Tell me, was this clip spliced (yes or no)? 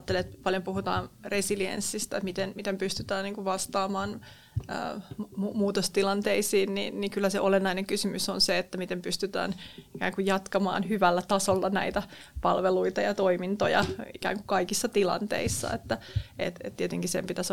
no